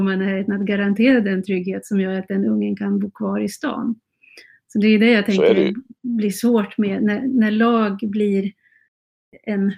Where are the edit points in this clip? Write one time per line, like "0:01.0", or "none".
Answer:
none